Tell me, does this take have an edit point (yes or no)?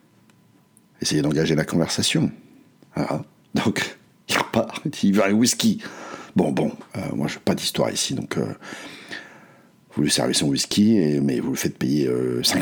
yes